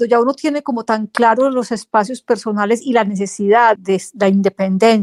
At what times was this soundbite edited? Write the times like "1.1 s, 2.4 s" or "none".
3.8 s